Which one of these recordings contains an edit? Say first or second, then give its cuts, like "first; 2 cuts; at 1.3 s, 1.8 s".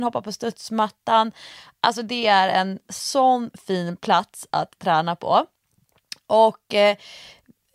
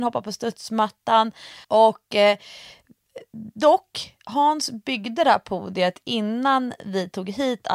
second; 1 cut; at 1.6 s